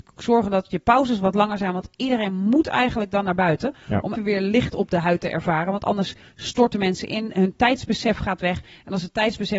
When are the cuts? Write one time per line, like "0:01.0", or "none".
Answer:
0:04.2